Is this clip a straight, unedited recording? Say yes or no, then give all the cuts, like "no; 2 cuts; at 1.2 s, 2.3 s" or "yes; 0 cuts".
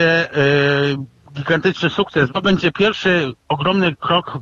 no; 1 cut; at 2.3 s